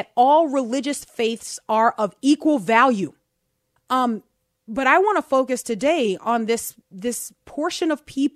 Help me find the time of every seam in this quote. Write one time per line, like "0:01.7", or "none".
0:03.8